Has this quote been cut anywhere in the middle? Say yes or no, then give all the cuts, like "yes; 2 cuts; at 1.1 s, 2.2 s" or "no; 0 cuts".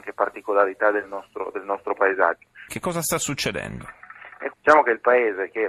yes; 2 cuts; at 2.7 s, 4.5 s